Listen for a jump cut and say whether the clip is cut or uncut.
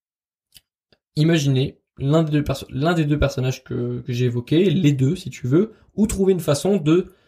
uncut